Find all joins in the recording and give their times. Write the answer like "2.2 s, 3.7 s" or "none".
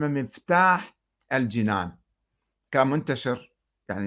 none